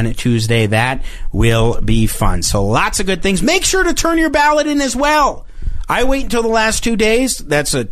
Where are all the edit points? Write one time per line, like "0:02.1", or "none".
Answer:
none